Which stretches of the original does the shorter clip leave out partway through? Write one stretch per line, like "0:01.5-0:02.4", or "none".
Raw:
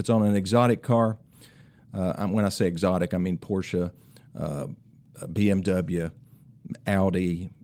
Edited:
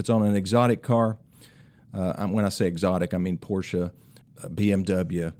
0:04.2-0:05.0

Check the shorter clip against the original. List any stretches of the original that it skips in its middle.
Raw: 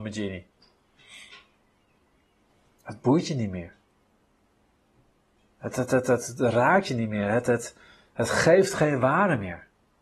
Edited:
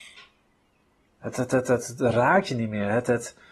0:02.2-0:05.5

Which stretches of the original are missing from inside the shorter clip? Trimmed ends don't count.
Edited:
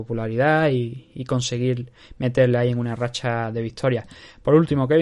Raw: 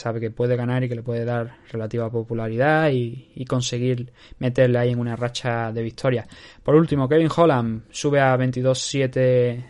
none

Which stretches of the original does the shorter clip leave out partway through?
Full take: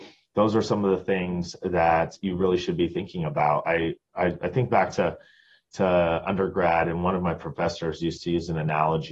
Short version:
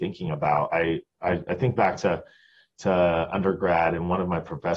none

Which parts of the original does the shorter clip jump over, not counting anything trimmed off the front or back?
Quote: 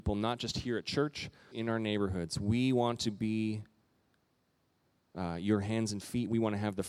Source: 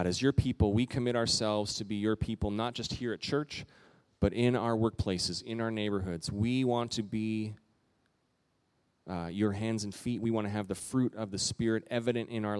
0:03.9-0:05.4

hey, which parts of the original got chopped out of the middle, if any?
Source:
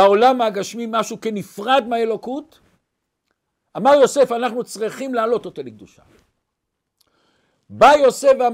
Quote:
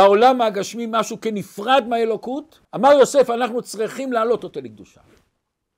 0:02.7-0:03.7

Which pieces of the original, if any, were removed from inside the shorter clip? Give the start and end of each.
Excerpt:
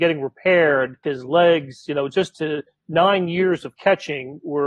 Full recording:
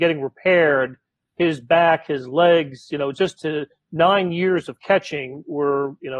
0:01.0-0:02.1

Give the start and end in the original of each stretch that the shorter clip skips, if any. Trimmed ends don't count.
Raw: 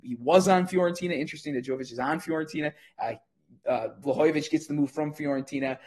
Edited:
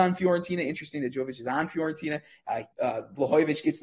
0:03.2-0:03.6

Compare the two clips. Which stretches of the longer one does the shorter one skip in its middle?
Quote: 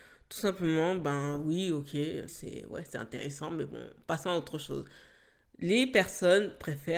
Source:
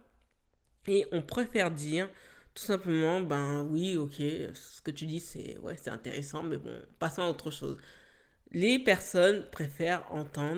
0:04.5-0:05.2

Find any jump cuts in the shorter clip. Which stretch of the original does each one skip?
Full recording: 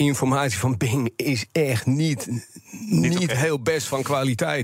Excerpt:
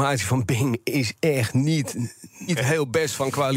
0:02.8-0:03.2

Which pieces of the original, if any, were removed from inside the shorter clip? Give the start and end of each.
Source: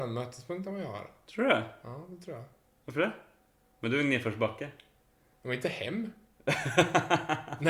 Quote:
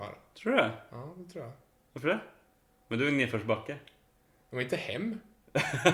none

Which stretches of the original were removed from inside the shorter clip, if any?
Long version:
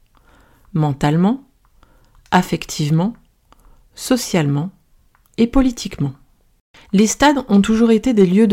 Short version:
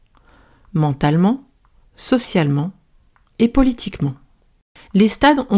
0:01.8-0:03.8

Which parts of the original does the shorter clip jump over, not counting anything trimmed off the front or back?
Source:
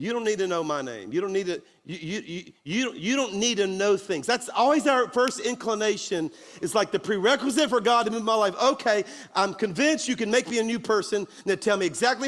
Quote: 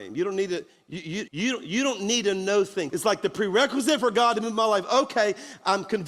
0:02.2-0:02.6
0:04.2-0:06.6

